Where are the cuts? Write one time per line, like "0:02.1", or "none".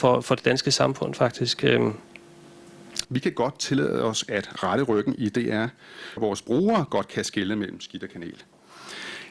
0:03.0
0:06.2